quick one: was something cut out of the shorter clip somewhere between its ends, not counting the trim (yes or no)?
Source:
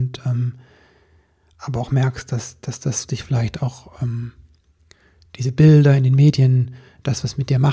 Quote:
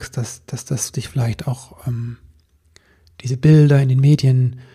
no